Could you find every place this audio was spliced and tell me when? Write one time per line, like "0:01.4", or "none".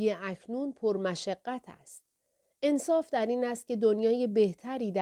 none